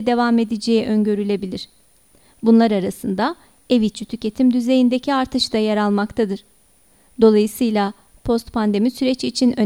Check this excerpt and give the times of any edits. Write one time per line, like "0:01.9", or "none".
none